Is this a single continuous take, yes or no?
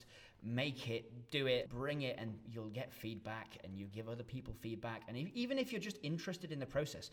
no